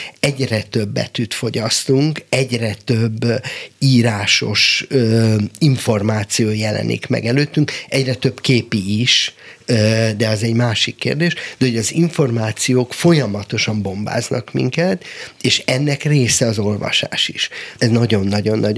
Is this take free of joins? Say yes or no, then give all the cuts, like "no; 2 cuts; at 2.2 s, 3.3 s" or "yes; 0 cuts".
no; 1 cut; at 17.8 s